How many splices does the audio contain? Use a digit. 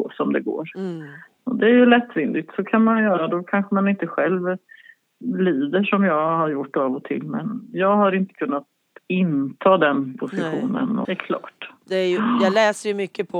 1